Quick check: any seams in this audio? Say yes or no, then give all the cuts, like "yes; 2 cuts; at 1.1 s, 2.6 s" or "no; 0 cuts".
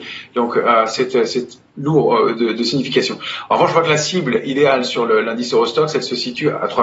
no; 0 cuts